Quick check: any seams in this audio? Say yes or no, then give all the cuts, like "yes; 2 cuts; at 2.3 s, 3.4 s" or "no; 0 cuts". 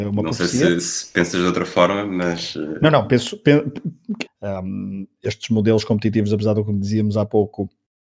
yes; 1 cut; at 4.3 s